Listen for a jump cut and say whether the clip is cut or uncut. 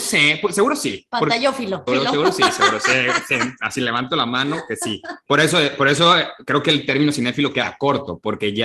cut